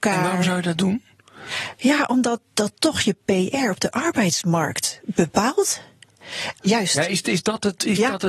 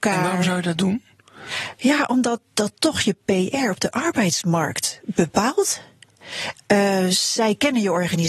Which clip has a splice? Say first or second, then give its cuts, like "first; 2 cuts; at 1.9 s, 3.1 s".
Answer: first; 1 cut; at 6.6 s